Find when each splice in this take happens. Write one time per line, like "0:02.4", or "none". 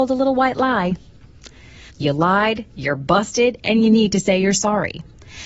0:01.9